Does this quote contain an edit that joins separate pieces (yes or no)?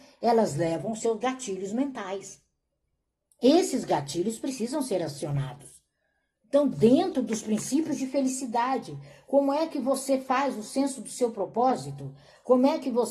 no